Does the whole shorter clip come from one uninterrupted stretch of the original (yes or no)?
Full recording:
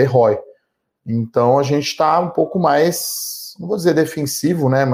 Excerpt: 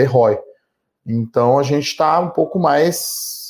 yes